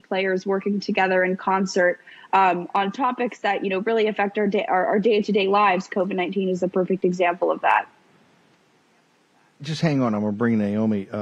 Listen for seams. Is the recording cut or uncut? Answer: uncut